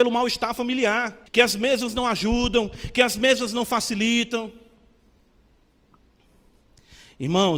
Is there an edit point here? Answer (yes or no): yes